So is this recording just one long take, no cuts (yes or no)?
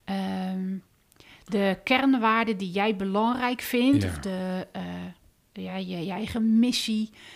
yes